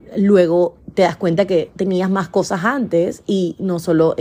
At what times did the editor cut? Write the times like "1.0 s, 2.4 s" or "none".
none

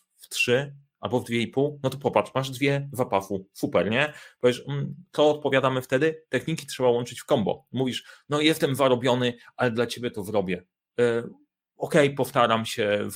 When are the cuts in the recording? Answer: none

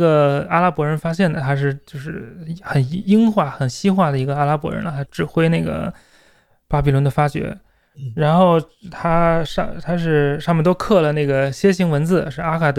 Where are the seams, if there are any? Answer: 5.0 s, 7.9 s

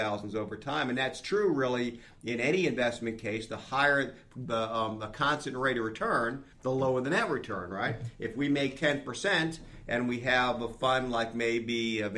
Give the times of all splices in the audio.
4.5 s, 6.5 s

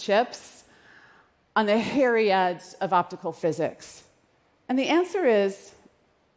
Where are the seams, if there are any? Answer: 4.6 s

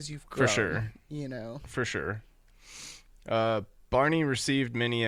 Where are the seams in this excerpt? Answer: none

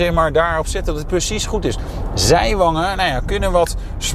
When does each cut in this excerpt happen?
none

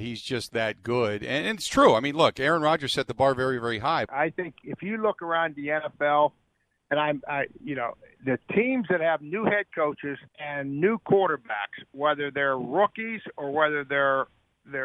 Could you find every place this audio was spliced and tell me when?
4.1 s, 10.3 s

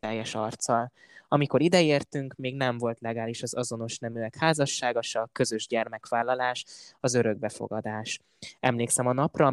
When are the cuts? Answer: none

